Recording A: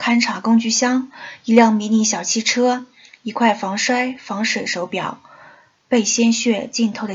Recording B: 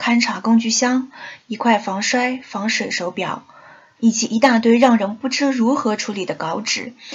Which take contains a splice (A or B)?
B